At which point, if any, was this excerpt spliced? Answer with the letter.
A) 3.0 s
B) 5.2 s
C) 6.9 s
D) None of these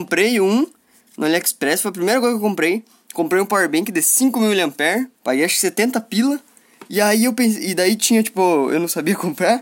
B